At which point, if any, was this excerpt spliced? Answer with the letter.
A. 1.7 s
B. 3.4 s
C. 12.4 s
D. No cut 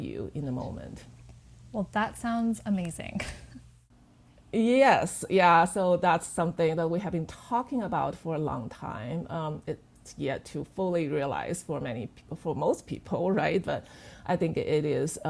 D